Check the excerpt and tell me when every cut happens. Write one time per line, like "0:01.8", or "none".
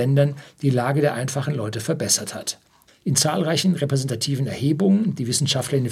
0:02.9